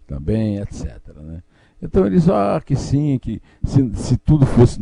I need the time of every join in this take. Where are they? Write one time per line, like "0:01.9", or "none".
none